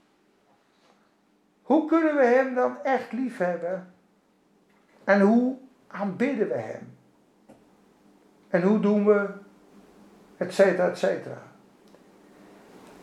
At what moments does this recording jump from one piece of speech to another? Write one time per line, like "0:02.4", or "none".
none